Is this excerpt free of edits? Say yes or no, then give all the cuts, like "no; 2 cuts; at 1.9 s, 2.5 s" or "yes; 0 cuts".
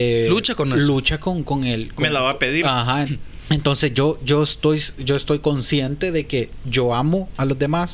no; 1 cut; at 3.1 s